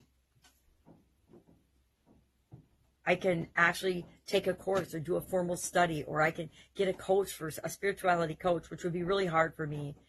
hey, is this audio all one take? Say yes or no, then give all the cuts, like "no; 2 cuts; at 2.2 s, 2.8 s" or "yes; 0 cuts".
yes; 0 cuts